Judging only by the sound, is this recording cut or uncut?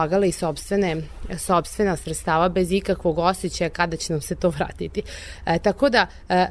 uncut